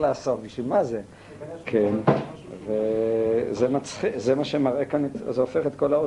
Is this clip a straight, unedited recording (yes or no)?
no